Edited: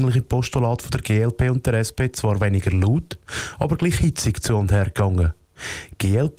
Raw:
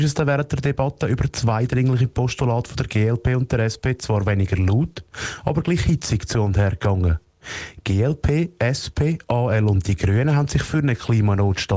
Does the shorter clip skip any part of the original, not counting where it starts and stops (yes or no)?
no